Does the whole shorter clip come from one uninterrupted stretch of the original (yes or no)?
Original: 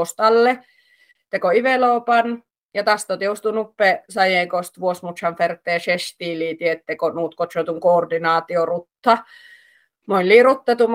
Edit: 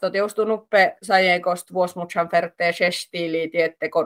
yes